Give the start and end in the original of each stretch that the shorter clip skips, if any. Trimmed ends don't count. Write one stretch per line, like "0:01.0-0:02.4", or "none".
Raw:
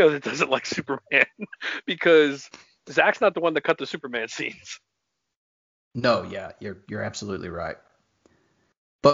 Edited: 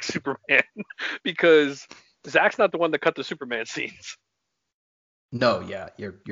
none